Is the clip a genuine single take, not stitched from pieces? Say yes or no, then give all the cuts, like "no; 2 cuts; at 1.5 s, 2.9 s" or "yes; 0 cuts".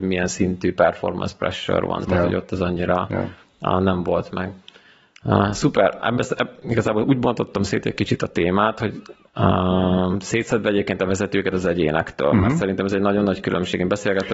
yes; 0 cuts